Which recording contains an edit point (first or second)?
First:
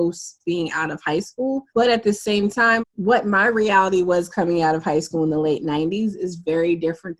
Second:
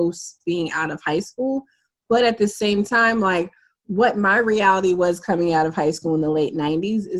first